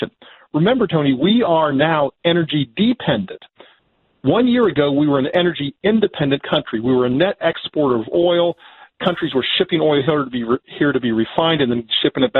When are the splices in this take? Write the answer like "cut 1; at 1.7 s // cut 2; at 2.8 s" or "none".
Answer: none